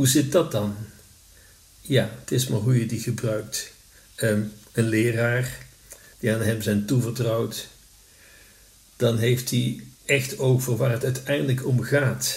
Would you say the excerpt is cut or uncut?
cut